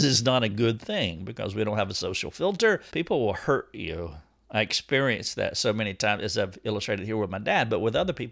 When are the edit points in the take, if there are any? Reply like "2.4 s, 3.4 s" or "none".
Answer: 2.9 s